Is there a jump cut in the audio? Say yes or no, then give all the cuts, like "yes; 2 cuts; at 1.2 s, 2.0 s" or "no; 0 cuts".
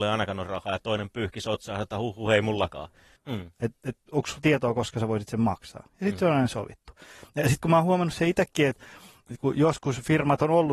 yes; 1 cut; at 3.2 s